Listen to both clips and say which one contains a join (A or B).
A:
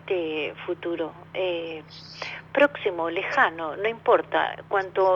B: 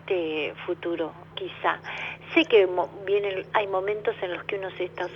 B